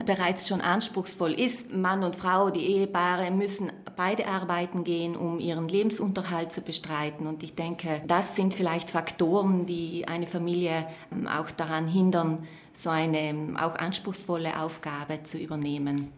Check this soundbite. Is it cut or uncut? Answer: cut